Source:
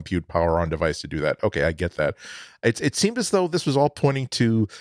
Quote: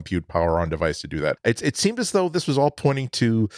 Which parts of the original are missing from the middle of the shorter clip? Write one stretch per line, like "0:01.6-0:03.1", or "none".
0:01.4-0:02.6